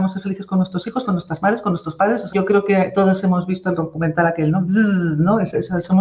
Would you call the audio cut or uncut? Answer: cut